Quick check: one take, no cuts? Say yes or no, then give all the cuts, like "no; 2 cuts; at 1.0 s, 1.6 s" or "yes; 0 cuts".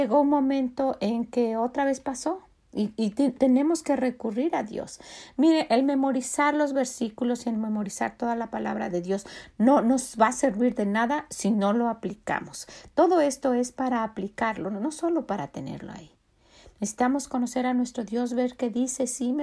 yes; 0 cuts